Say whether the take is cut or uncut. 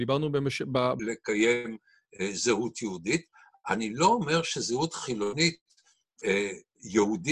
cut